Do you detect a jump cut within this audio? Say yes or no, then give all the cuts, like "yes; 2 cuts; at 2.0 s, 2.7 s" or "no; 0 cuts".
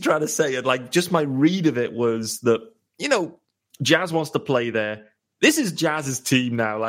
no; 0 cuts